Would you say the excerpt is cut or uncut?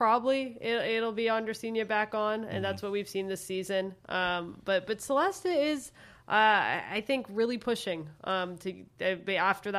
uncut